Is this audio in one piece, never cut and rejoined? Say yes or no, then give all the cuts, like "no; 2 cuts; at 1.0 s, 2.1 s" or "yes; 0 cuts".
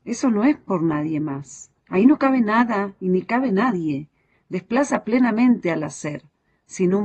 no; 1 cut; at 1.8 s